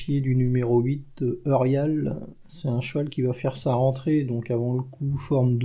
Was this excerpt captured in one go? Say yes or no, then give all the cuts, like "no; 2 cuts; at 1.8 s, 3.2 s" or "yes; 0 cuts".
yes; 0 cuts